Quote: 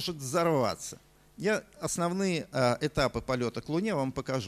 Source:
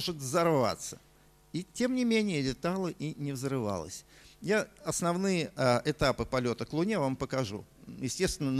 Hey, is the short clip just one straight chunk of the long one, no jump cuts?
no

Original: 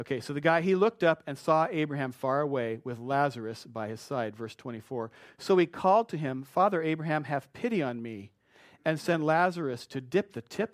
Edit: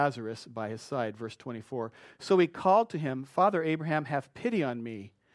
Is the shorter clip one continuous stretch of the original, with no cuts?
yes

